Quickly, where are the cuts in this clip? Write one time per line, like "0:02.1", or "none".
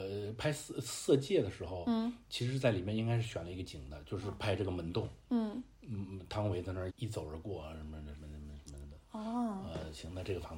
0:06.9